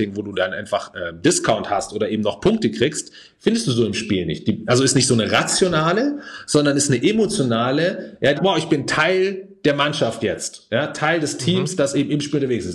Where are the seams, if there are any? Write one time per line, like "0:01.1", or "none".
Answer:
0:08.4